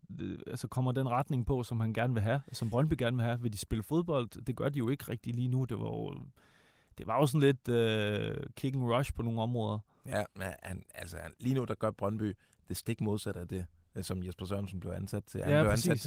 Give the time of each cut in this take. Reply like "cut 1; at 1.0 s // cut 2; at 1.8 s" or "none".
none